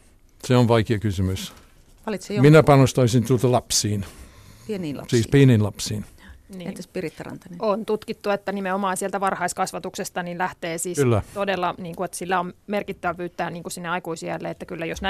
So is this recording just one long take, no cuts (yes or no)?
yes